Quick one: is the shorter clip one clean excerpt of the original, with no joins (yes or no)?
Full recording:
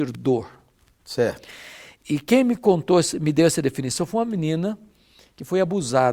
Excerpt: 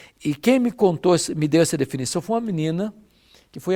yes